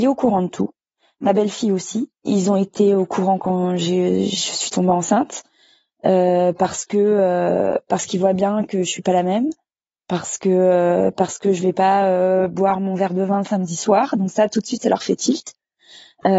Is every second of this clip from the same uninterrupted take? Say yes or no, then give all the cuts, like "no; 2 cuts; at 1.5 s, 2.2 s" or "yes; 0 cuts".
yes; 0 cuts